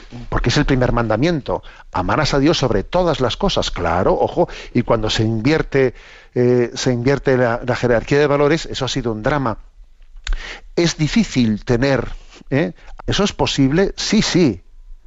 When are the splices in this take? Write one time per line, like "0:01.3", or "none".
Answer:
0:13.0